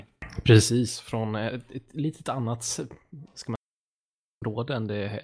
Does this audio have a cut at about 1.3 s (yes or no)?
no